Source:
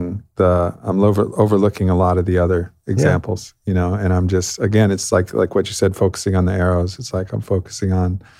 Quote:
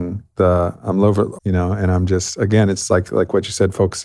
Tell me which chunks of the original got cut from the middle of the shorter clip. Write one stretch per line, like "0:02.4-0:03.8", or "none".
0:01.3-0:03.6